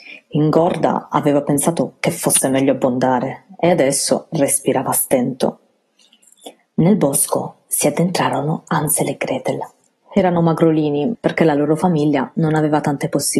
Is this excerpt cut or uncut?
cut